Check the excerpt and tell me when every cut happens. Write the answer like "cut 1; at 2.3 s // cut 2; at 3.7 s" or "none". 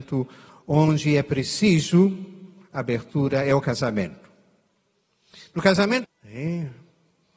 cut 1; at 6.0 s